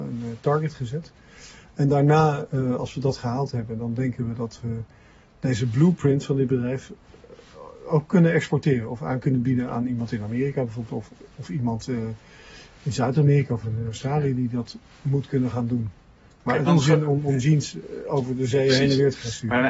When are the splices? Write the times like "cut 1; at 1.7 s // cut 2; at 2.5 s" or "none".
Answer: cut 1; at 16.7 s